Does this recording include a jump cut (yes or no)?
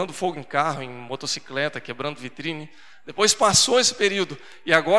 no